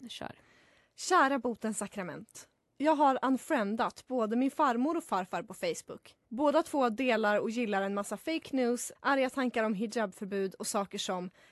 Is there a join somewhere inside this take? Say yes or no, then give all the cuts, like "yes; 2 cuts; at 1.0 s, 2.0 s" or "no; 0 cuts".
yes; 2 cuts; at 6.2 s, 8.9 s